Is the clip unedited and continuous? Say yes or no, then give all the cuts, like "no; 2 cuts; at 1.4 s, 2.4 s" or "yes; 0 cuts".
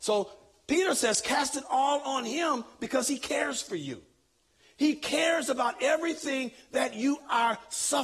yes; 0 cuts